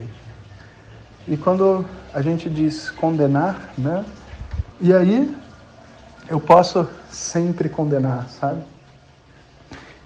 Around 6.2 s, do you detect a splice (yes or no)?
no